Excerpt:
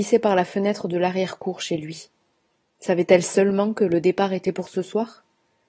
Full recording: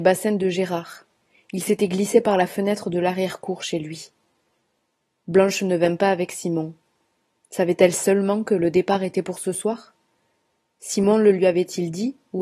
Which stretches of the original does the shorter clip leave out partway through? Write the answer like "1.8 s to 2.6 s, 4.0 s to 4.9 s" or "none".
4.8 s to 7.5 s